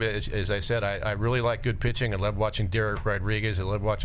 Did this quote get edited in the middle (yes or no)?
no